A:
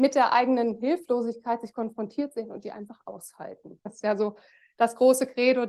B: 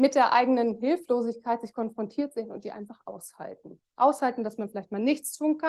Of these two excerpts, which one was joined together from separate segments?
A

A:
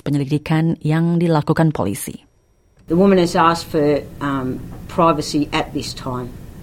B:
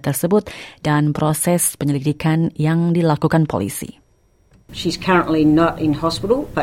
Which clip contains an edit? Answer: A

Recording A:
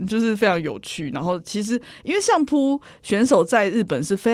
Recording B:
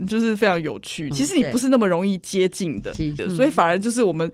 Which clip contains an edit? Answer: B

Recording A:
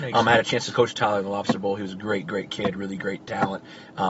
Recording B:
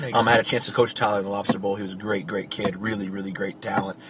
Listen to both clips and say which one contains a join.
A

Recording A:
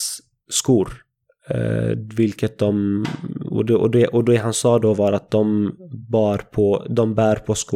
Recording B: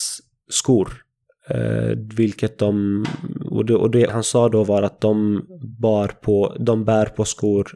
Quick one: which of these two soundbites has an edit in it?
B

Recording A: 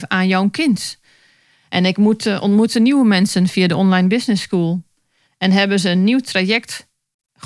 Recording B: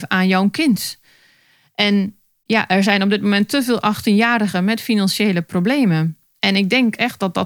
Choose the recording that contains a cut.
A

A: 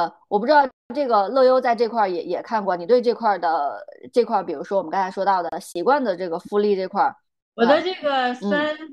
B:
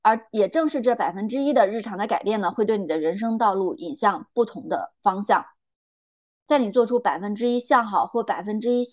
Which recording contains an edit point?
B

